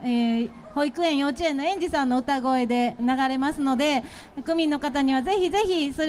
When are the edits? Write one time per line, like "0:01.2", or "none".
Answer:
0:03.0

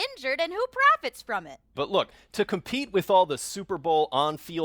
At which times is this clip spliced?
none

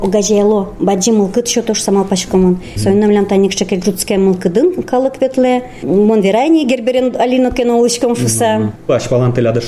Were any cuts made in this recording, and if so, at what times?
none

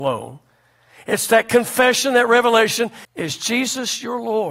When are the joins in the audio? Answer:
0:03.0

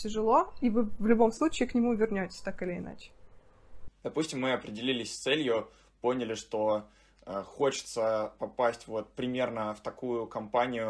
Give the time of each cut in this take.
0:04.0

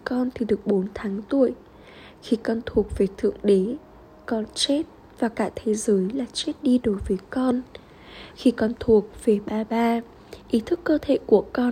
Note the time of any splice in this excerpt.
none

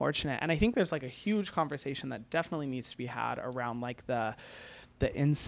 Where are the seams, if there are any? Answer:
none

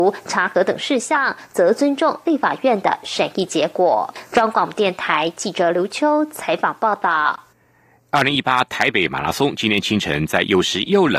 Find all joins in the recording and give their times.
0:04.3

